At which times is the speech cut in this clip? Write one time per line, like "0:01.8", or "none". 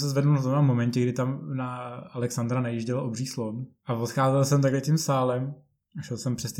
none